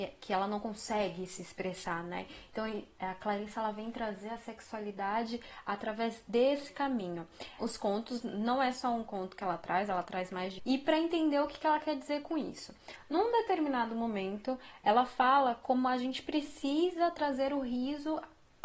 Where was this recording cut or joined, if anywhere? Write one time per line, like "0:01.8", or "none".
0:07.6
0:10.6